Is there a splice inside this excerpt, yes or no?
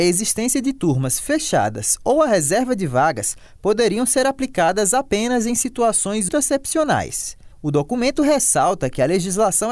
yes